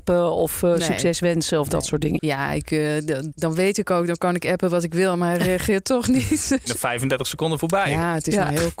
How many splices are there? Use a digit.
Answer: 3